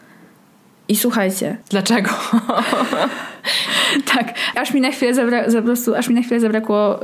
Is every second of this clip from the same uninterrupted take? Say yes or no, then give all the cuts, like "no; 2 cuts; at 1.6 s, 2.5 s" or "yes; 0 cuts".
no; 2 cuts; at 1.6 s, 4.5 s